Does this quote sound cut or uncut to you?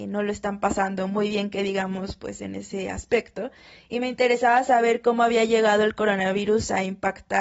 uncut